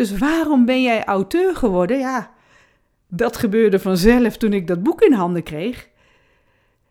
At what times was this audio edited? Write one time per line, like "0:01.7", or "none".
none